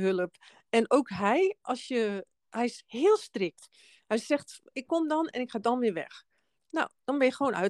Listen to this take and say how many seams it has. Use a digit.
0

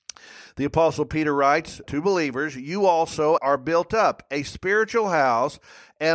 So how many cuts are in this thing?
2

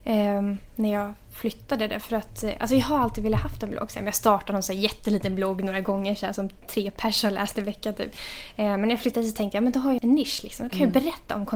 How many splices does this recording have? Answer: 1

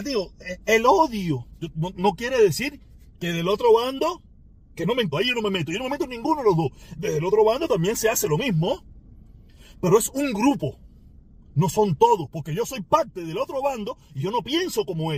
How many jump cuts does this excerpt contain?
1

